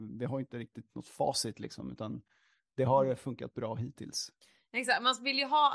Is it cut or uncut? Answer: uncut